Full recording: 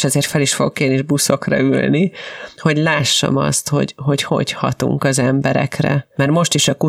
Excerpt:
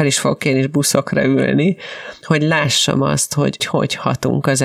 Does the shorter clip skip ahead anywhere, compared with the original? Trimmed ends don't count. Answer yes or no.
yes